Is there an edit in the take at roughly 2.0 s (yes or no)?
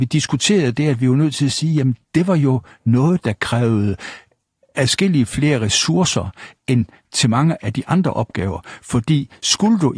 yes